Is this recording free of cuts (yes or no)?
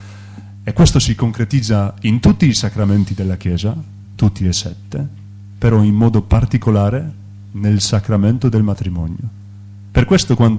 yes